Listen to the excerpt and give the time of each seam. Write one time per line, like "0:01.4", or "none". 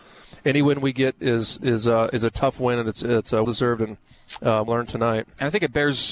0:03.4
0:04.7